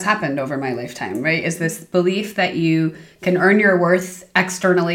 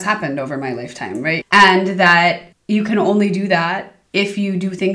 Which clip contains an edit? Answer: second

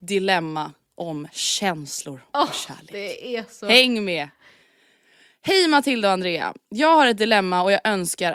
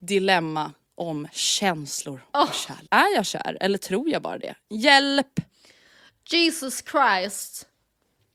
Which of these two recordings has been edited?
second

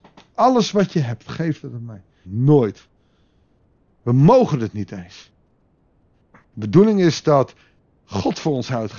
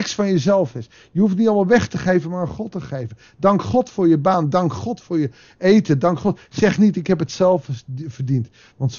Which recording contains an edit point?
first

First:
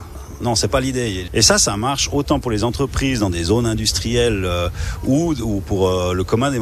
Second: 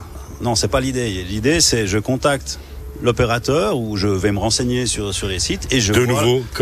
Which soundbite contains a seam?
first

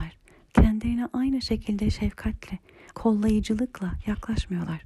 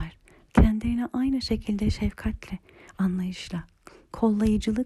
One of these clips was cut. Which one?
first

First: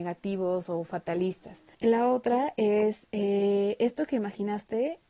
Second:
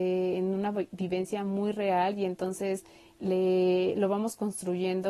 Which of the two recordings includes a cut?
first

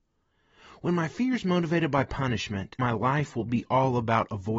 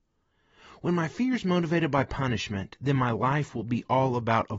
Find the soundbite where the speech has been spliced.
first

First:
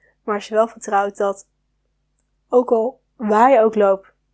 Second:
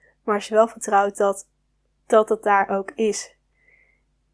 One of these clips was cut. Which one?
second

